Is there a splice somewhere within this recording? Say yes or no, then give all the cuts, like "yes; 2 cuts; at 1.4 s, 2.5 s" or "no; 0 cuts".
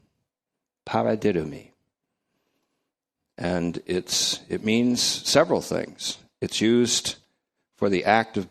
no; 0 cuts